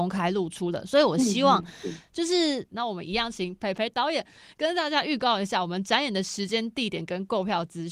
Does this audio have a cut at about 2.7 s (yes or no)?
yes